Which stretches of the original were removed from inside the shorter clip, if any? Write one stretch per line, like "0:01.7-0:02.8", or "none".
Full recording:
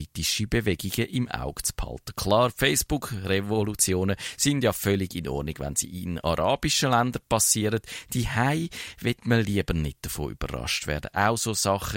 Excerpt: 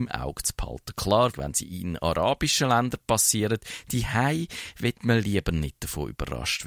0:02.5-0:05.5